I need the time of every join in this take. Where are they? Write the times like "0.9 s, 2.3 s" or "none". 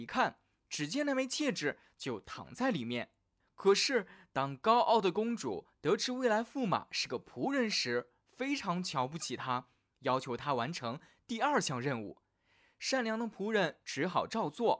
3.4 s